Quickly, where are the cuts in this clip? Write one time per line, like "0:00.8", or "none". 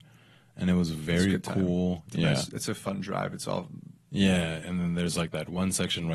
0:04.6